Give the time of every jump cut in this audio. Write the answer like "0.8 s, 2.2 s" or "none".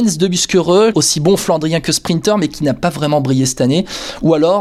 0.9 s